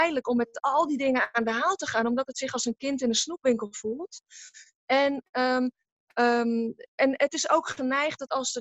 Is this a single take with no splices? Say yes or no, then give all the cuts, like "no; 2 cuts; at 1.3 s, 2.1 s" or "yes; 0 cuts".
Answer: yes; 0 cuts